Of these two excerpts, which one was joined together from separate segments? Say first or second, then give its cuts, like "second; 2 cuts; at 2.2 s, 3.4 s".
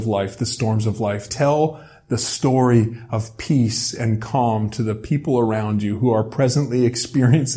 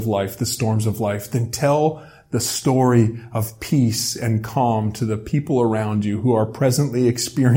first; 1 cut; at 1.3 s